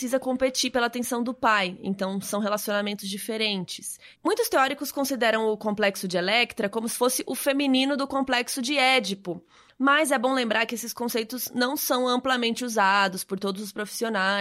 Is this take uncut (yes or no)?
yes